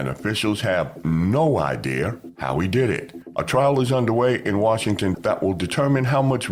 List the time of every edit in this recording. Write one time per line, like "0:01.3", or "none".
0:03.3
0:05.1